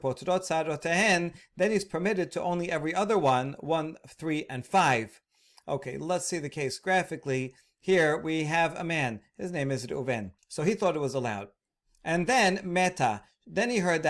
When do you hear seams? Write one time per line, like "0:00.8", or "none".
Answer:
0:10.4